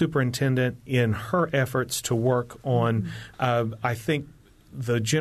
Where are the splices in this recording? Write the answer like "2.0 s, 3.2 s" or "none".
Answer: 3.3 s